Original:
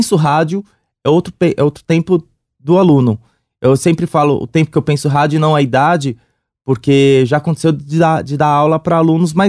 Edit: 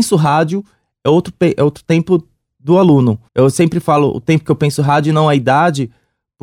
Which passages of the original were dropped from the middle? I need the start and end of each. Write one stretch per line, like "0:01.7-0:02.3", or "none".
0:03.3-0:03.5